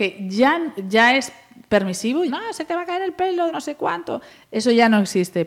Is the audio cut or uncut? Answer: cut